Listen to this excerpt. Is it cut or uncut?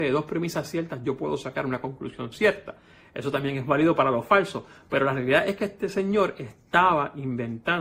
uncut